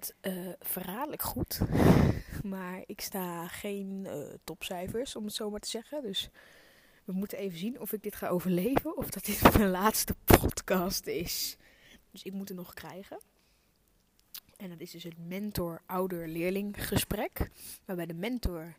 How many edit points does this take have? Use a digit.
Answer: 1